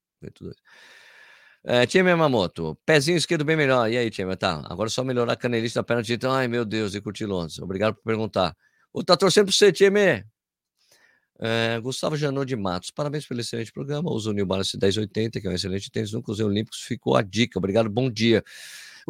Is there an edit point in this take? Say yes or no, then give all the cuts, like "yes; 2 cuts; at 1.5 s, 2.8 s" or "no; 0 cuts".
no; 0 cuts